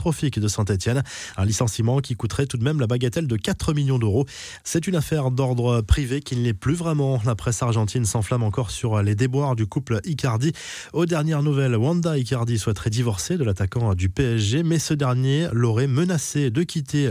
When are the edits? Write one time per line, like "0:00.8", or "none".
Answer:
none